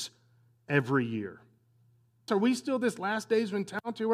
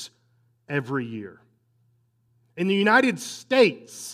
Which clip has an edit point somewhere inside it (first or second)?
first